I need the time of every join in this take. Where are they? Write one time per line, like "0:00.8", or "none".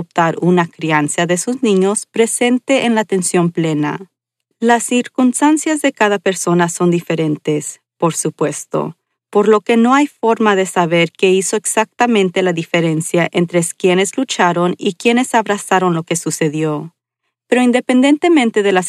0:04.5